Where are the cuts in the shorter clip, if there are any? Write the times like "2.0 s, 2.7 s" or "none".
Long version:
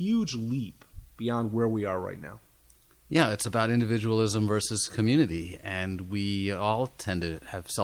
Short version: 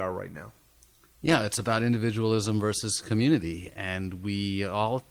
none